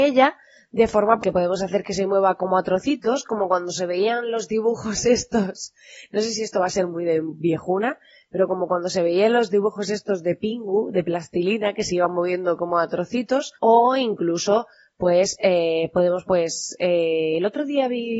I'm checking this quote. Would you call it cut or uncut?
cut